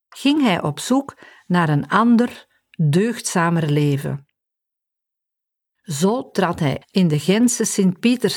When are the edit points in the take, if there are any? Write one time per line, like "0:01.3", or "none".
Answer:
0:06.8

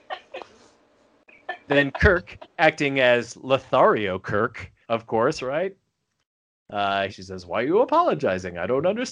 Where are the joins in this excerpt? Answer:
0:04.8
0:07.1

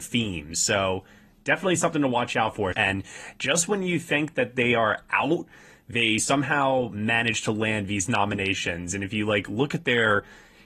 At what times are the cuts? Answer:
0:02.7

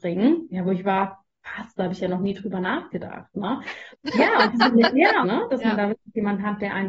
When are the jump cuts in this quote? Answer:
0:03.9
0:05.2

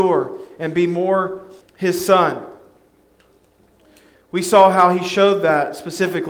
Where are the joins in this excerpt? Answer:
0:01.6

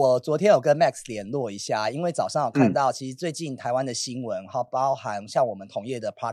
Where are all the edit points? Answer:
none

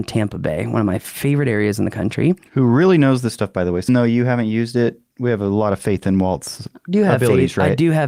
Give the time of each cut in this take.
0:03.9

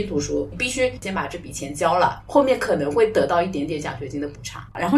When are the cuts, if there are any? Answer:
none

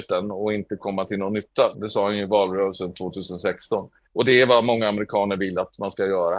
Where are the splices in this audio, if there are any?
0:01.7
0:04.1

